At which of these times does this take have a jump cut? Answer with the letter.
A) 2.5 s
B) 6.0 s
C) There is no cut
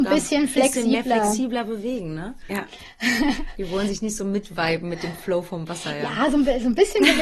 A